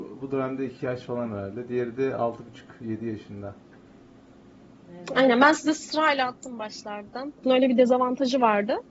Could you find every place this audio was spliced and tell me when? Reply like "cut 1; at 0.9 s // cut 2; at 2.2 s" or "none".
cut 1; at 7.4 s